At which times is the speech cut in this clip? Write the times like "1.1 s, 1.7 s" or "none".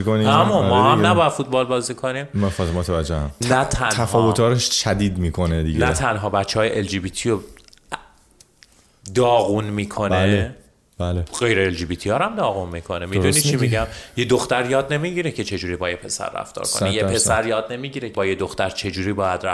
3.4 s, 18.1 s

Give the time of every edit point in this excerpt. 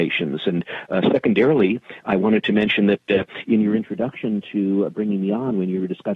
none

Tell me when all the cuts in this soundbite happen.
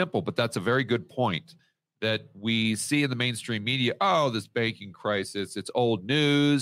none

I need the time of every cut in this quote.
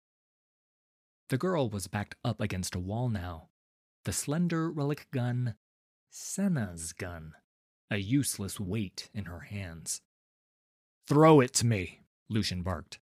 none

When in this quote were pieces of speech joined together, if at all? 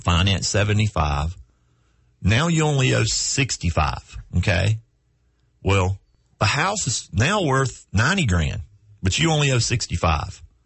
4.3 s

